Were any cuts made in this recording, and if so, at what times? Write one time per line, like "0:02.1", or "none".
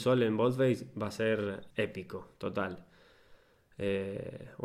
0:01.7